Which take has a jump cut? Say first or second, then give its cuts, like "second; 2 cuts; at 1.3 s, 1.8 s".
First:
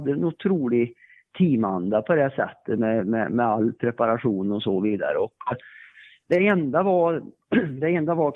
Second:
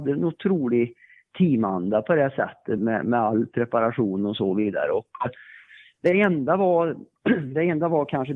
second; 1 cut; at 2.8 s